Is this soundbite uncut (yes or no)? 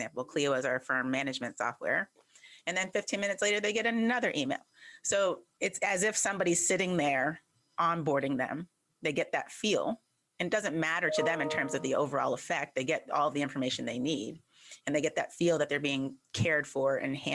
yes